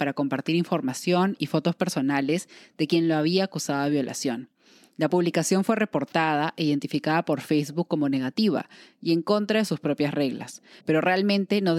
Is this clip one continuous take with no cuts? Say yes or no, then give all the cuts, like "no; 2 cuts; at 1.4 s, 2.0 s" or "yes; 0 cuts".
no; 1 cut; at 10.8 s